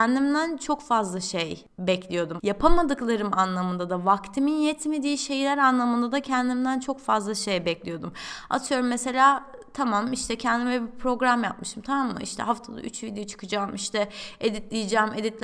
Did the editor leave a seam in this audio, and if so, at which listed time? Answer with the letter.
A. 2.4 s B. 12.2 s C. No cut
A